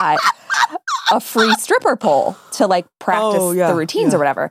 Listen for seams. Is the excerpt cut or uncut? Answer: uncut